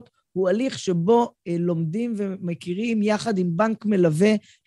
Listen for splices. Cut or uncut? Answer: uncut